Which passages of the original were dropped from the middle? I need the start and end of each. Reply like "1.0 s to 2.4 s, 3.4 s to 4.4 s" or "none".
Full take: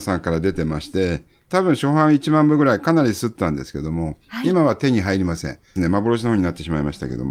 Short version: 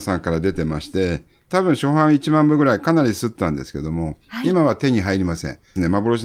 none